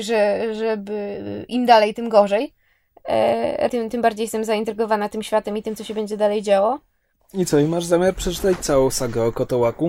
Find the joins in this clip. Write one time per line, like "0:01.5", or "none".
0:03.7
0:07.2